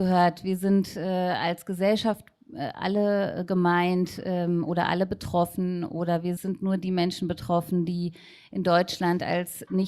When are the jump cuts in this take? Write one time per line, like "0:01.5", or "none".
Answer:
0:06.4